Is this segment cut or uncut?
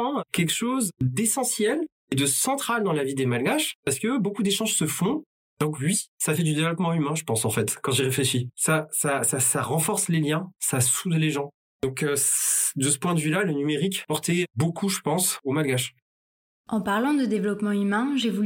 cut